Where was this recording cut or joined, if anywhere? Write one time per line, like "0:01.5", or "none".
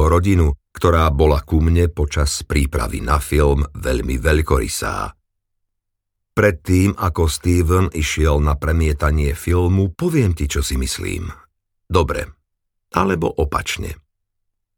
0:09.9

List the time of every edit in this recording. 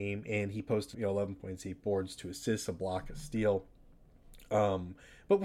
0:00.9

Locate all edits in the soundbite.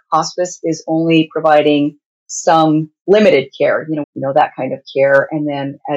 0:04.0

